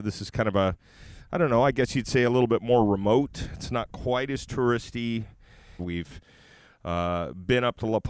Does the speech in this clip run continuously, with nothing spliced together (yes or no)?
no